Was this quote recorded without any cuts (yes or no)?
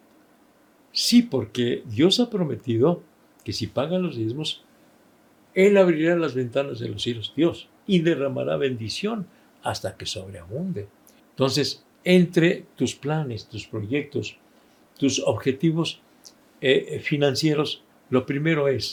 no